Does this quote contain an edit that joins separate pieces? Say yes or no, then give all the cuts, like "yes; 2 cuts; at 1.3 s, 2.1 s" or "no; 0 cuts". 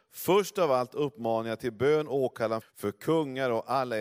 yes; 1 cut; at 2.6 s